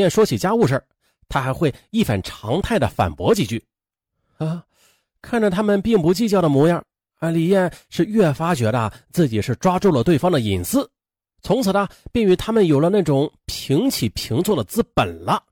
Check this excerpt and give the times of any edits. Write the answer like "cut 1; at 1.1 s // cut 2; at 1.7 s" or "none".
none